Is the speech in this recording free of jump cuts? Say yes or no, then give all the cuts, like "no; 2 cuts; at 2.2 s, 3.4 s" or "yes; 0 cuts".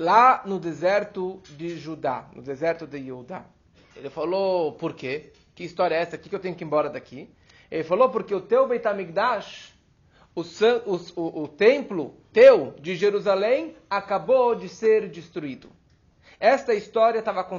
no; 1 cut; at 3.9 s